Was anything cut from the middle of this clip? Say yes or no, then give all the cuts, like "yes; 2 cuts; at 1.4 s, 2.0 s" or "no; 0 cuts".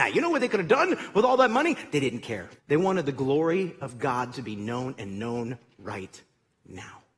yes; 1 cut; at 2.6 s